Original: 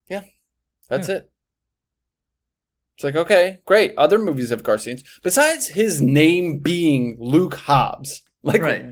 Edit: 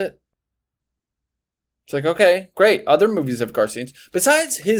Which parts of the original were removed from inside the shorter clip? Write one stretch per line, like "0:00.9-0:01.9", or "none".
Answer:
none